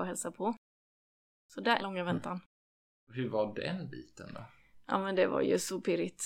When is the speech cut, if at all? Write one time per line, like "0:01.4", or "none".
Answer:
0:01.8